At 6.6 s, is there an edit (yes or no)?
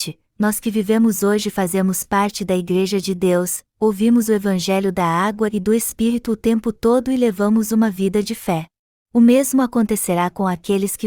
no